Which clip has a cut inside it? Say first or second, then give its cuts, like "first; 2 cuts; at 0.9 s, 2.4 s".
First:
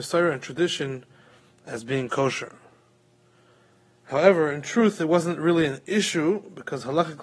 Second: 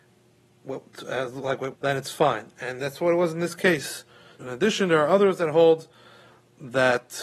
second; 2 cuts; at 1.7 s, 4.4 s